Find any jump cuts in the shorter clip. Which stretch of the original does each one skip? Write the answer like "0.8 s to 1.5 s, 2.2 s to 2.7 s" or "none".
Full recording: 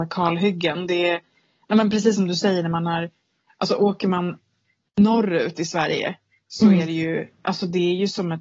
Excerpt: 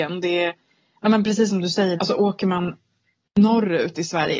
2.6 s to 3.6 s